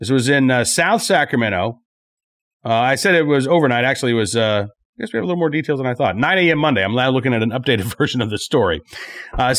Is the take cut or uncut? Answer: uncut